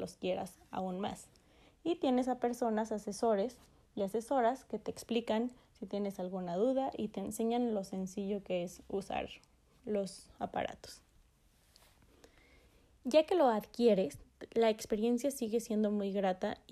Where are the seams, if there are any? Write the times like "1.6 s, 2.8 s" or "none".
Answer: none